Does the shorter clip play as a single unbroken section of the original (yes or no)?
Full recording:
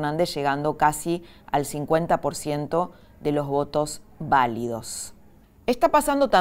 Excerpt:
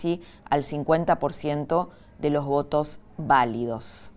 yes